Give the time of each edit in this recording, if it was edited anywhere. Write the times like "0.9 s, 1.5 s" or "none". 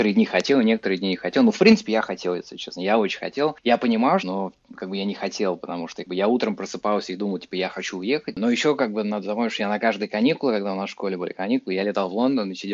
4.2 s, 8.3 s